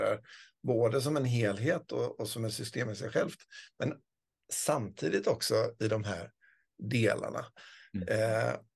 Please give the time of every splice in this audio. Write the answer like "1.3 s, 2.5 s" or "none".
none